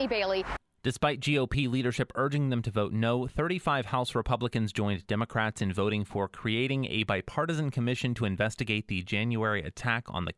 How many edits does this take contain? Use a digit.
0